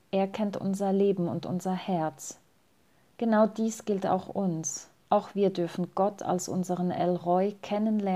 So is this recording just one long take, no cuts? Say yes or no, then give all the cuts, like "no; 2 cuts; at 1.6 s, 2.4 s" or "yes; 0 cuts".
no; 2 cuts; at 3.2 s, 5.0 s